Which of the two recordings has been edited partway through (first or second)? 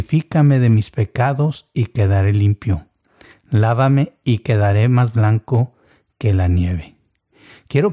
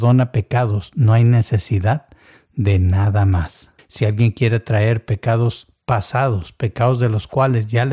second